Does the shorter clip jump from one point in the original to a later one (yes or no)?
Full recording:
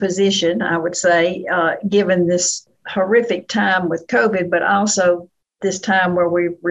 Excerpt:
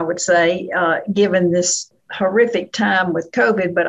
no